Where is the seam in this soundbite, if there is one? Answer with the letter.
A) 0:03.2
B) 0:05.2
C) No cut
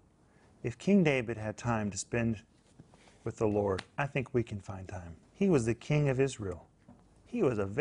B